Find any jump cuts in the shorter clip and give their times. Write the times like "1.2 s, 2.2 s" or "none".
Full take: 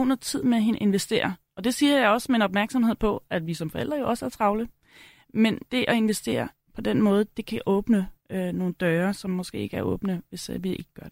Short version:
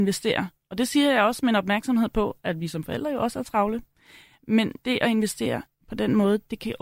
none